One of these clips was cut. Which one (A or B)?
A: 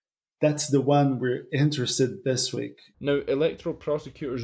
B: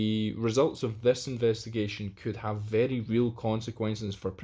A